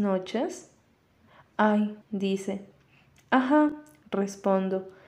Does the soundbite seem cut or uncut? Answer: cut